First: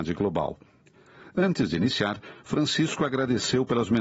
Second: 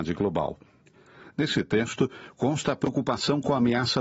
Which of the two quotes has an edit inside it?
second; 1 cut; at 1.3 s

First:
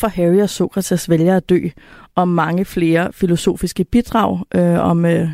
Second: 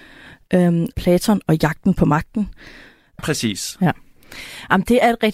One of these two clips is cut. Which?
second; 2 cuts; at 0.9 s, 3.2 s

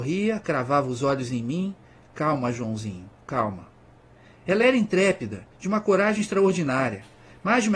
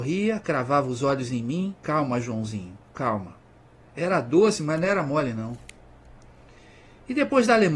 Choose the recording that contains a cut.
second; 2 cuts; at 1.8 s, 3.8 s

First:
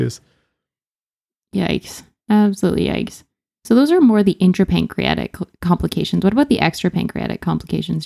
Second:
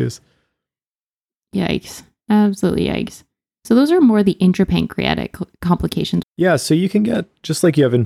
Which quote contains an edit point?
second; 1 cut; at 6.2 s

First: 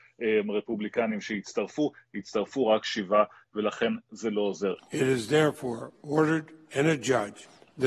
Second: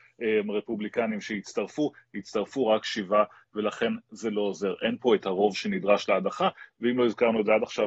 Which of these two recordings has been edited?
first; 1 cut; at 4.8 s

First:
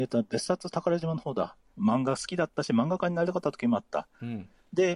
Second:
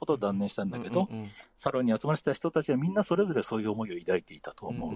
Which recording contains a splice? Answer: first; 1 cut; at 1.7 s

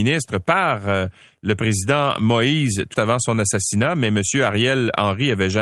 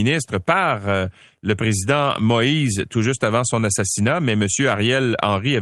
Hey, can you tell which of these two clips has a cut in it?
first; 1 cut; at 2.9 s

